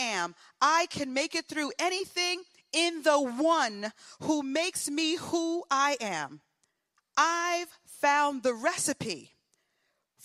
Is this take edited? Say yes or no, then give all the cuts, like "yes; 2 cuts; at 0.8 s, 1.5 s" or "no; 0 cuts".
yes; 1 cut; at 7.0 s